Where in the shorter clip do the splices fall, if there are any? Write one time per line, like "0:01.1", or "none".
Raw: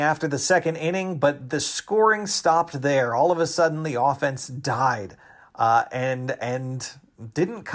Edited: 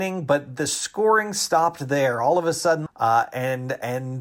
0:02.9